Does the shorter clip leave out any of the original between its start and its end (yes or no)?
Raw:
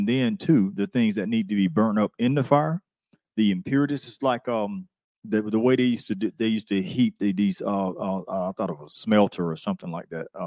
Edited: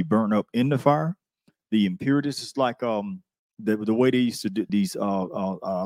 yes